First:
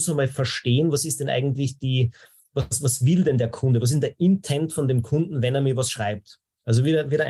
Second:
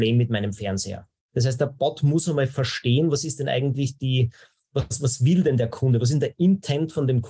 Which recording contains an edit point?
second; 1 cut; at 1.3 s

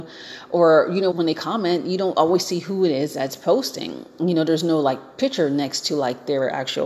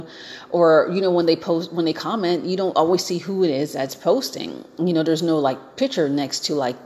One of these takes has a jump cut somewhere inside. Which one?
first; 1 cut; at 1.1 s

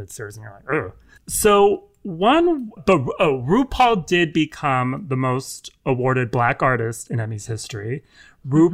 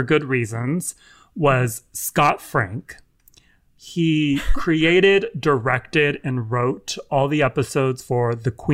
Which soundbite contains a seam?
first; 2 cuts; at 1.2 s, 2.8 s

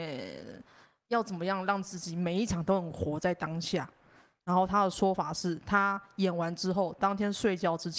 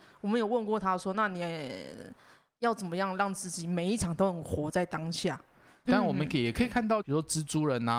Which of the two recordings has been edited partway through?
second; 2 cuts; at 5.8 s, 7.0 s

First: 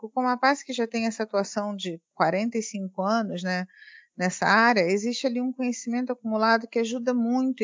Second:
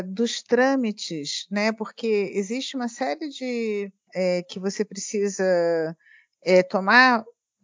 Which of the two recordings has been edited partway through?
second; 1 cut; at 4.1 s

